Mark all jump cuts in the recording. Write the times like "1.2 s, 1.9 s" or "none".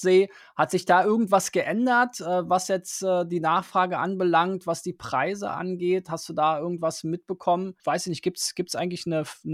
none